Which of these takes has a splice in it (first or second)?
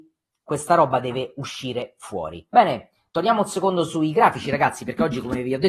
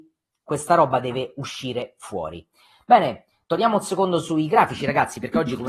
first